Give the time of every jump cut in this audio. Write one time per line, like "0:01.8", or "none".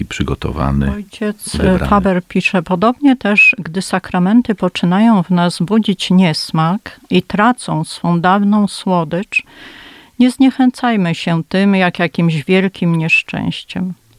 none